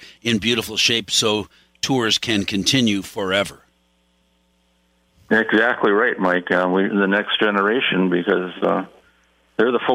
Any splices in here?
yes; 1 cut; at 6.9 s

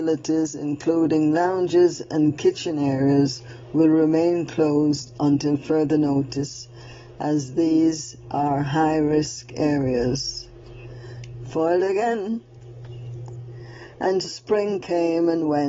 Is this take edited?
yes; 1 cut; at 14.2 s

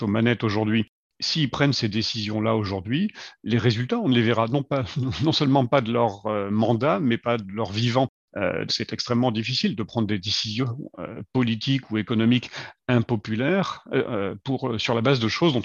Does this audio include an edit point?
yes; 1 cut; at 8.7 s

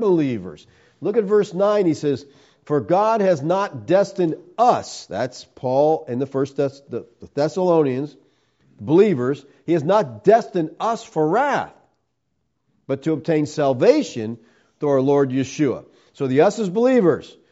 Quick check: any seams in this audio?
no; 0 cuts

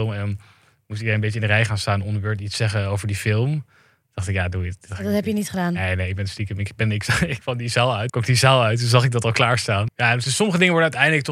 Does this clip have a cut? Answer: yes; 2 cuts; at 8.1 s, 9.9 s

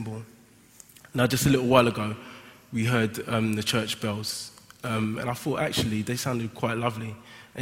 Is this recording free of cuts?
yes; 0 cuts

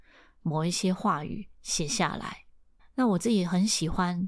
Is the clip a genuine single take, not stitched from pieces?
yes; 0 cuts

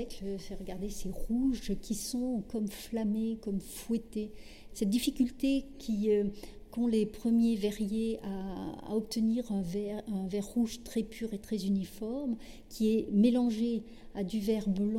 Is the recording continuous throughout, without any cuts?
no; 1 cut; at 4.7 s

